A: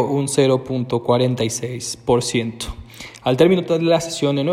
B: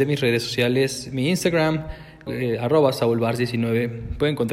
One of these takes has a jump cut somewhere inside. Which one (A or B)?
B